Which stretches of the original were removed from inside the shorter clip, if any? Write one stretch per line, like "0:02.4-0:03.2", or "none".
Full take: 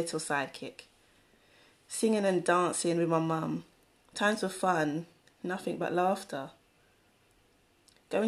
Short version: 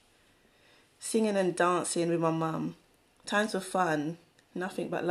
none